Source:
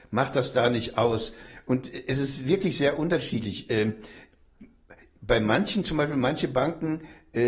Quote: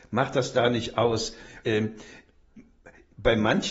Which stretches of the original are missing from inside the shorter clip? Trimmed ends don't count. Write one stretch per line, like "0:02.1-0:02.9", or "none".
0:01.6-0:03.7